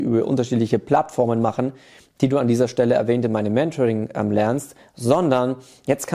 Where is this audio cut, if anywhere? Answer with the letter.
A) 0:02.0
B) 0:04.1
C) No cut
C